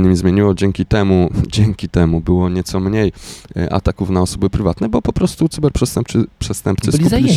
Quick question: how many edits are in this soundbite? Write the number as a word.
zero